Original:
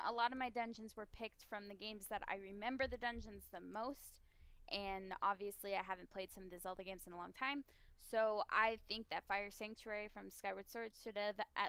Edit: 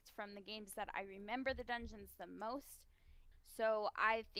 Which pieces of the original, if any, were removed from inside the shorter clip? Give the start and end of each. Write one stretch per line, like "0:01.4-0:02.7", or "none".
0:04.6-0:07.9